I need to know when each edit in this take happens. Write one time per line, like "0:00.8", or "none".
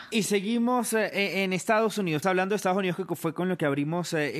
0:02.2